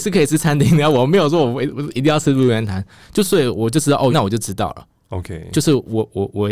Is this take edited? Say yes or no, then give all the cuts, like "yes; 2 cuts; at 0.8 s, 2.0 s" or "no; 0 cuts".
yes; 1 cut; at 4.1 s